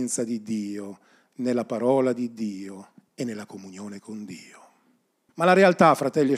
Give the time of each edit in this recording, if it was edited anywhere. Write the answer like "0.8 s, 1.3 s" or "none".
5.3 s